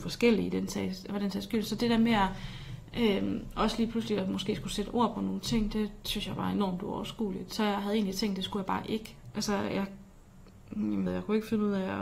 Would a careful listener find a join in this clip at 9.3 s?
yes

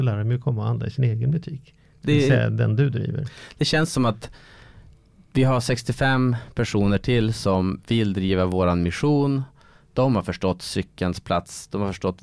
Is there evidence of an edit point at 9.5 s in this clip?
no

